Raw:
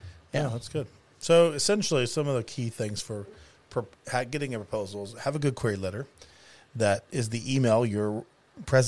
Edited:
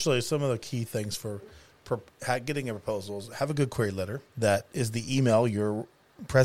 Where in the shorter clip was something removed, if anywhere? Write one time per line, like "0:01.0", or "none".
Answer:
0:04.3